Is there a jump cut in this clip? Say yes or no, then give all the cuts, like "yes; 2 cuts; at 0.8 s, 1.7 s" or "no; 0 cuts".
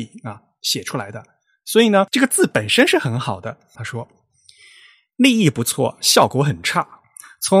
yes; 1 cut; at 3.7 s